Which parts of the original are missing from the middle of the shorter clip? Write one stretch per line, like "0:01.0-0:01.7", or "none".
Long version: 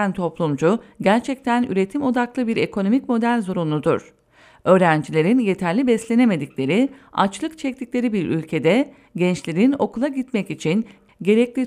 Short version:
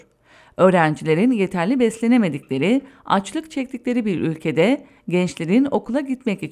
none